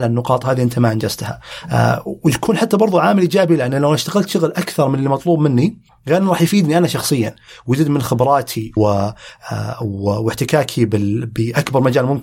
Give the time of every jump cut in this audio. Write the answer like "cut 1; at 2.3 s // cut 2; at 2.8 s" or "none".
cut 1; at 8.8 s

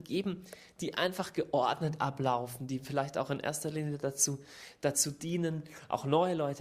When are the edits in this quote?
none

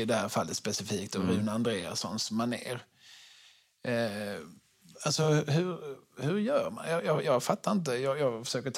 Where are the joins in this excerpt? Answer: none

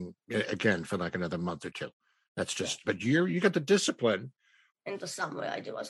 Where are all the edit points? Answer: cut 1; at 2.8 s // cut 2; at 4.7 s

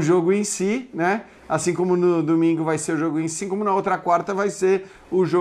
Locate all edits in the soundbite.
cut 1; at 3.4 s

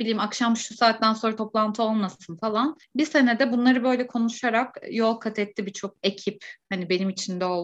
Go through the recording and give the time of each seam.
none

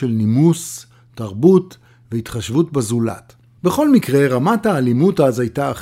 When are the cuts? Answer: cut 1; at 3.6 s

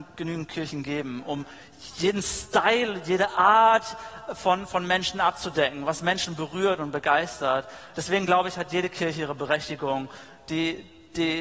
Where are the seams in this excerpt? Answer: none

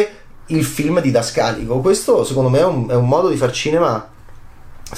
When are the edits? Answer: none

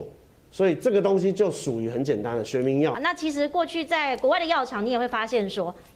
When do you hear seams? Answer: cut 1; at 2.9 s

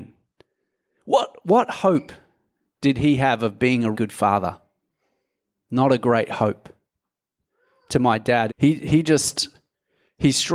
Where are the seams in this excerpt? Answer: cut 1; at 3.9 s // cut 2; at 8.5 s

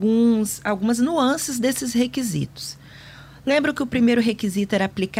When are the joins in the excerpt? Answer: none

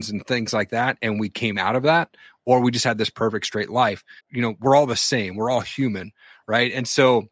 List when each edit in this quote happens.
cut 1; at 4.2 s

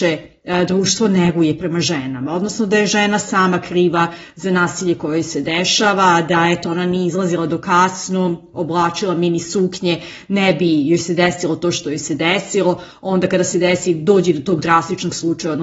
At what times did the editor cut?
none

